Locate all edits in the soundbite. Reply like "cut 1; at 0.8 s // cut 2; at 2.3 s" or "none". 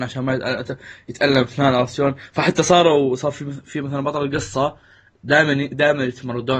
none